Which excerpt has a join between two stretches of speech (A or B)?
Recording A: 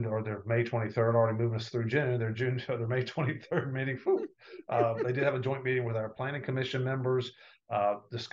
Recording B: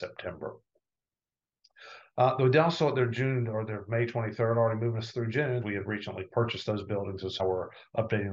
B